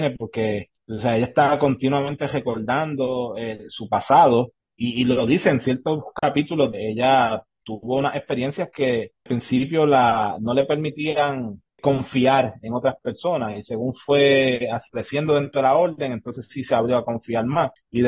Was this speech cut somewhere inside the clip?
yes; 1 cut; at 6.7 s

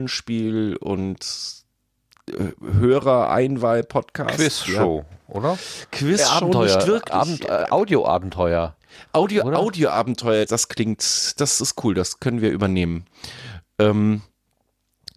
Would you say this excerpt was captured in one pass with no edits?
no; 1 cut; at 10.5 s

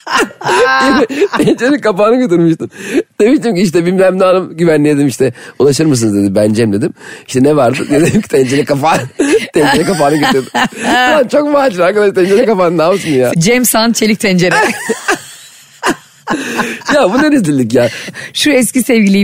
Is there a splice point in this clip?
yes; 2 cuts; at 13.3 s, 18.1 s

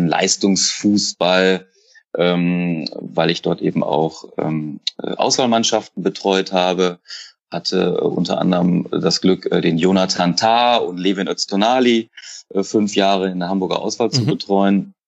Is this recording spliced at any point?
no; 0 cuts

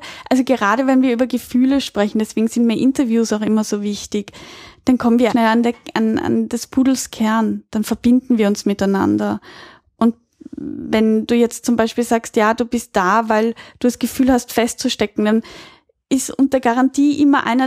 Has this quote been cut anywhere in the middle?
yes; 1 cut; at 5.3 s

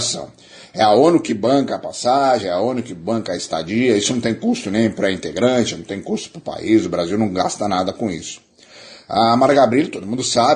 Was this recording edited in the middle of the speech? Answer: no; 0 cuts

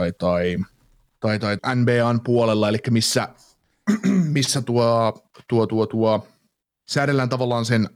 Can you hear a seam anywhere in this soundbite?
yes; 1 cut; at 1.6 s

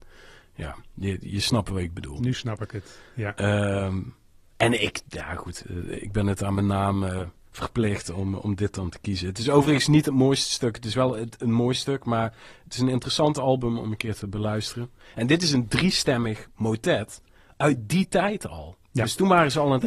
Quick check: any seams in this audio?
no; 0 cuts

